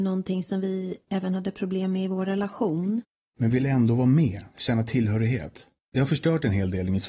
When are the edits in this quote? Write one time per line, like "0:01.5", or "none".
0:03.3
0:05.8